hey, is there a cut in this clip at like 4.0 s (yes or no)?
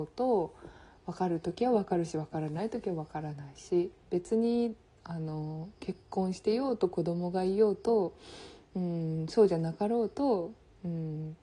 yes